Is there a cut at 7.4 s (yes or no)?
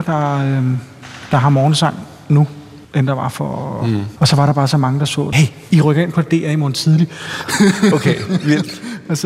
no